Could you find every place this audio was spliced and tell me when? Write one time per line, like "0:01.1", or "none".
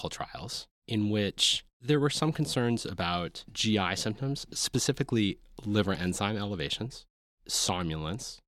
none